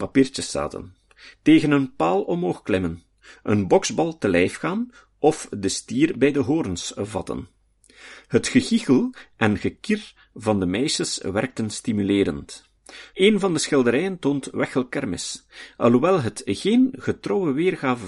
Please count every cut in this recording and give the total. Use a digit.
1